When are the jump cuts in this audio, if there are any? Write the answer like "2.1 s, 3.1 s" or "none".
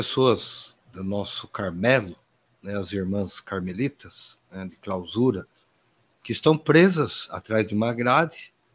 none